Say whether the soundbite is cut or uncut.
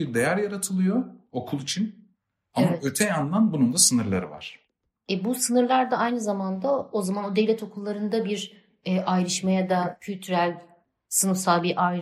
uncut